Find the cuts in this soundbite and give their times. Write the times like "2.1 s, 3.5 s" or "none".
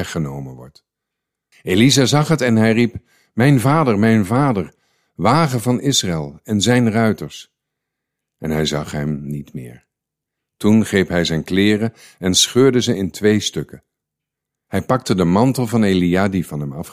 1.5 s